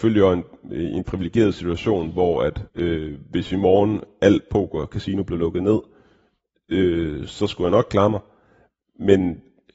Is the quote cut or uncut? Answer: cut